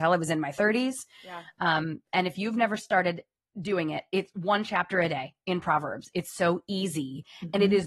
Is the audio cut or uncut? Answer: uncut